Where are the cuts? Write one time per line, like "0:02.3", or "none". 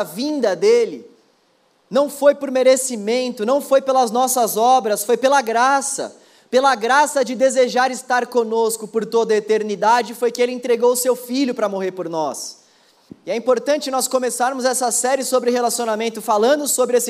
0:13.1